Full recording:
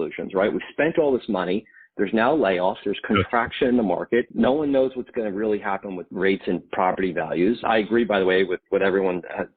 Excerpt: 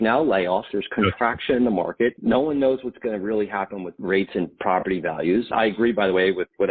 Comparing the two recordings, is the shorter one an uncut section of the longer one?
yes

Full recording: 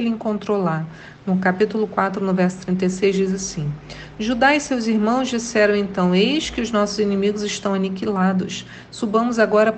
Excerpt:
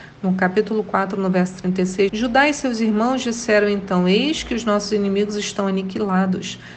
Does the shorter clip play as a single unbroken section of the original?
no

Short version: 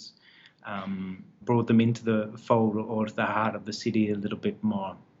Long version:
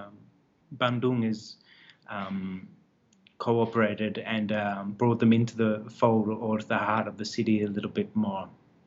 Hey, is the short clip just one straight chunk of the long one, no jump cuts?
no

